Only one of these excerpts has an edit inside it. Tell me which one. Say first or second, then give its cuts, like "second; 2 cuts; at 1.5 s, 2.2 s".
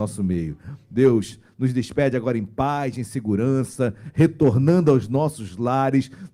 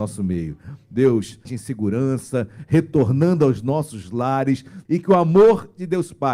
second; 2 cuts; at 1.5 s, 4.8 s